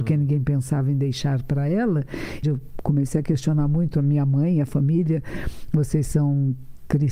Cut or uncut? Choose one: cut